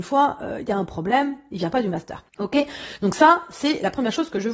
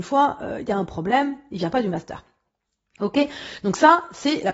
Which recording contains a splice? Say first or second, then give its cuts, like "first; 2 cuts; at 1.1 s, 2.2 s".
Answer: first; 1 cut; at 2.3 s